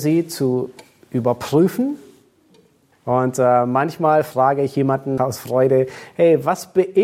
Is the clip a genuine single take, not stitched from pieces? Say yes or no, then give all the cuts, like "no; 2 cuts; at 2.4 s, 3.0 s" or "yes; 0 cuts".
no; 2 cuts; at 2.9 s, 5.2 s